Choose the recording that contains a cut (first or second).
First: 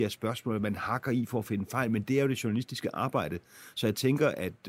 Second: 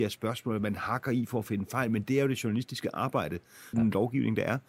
second